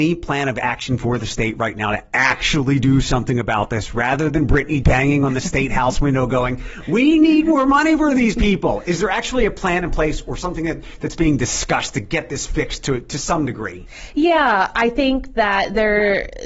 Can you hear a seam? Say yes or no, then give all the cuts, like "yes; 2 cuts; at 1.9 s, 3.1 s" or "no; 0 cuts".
yes; 1 cut; at 4.8 s